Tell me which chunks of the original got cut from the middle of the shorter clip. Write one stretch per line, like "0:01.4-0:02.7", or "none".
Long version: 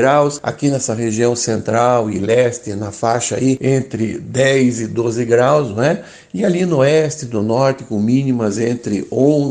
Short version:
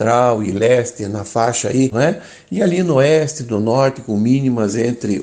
0:03.6-0:05.7